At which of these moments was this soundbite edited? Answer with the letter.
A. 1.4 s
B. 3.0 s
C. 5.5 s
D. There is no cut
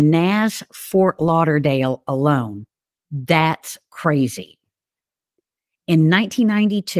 D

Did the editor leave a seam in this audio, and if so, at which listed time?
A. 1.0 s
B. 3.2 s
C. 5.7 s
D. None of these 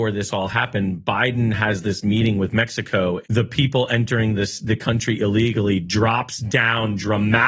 B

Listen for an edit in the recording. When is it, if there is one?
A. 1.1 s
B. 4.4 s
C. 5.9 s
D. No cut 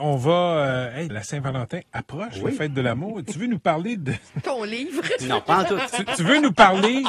A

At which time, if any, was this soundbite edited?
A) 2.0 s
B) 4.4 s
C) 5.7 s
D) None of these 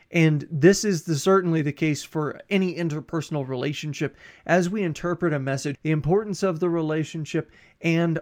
C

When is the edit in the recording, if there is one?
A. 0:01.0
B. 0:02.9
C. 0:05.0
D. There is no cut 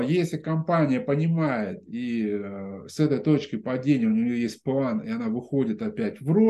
D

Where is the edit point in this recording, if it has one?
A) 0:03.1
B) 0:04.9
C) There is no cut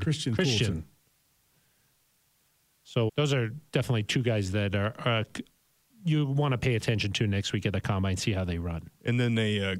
A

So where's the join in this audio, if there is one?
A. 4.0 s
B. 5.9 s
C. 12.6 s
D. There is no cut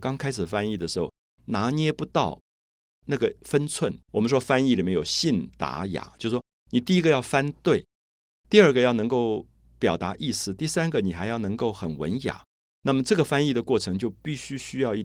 A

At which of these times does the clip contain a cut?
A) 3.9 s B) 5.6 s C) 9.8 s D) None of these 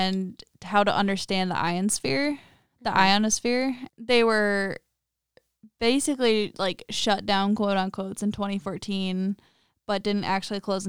A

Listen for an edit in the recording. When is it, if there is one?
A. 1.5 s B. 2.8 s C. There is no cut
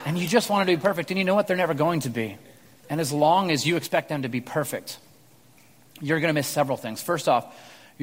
C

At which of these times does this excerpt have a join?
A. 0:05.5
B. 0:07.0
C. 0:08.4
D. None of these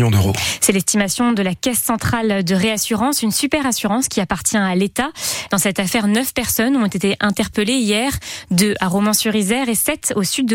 A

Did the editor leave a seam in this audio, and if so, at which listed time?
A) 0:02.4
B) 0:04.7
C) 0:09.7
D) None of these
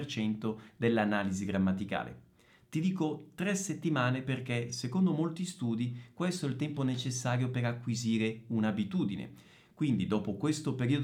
D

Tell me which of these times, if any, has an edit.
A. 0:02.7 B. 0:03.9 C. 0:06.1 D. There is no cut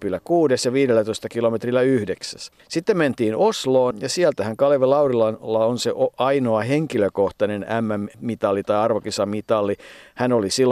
B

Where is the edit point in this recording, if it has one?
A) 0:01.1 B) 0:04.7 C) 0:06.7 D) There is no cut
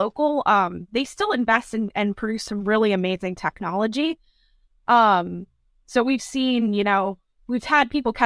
D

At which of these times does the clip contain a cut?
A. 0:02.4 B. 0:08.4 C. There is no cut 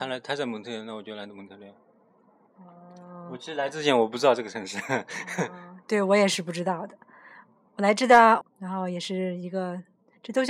B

